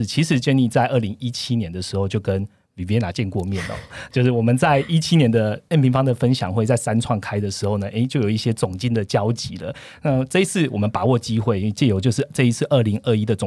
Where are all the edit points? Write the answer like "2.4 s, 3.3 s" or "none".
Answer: none